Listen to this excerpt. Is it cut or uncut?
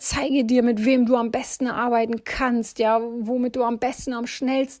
uncut